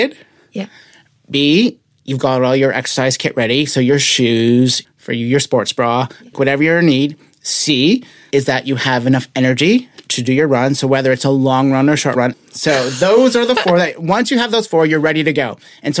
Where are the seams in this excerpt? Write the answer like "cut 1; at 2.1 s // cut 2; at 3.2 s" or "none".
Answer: cut 1; at 4.8 s // cut 2; at 6.3 s // cut 3; at 12.3 s